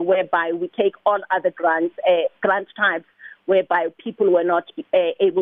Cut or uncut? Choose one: uncut